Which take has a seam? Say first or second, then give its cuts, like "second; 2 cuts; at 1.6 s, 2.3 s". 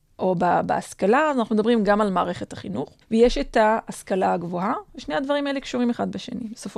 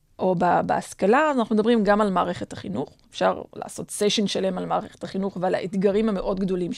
first; 1 cut; at 3.0 s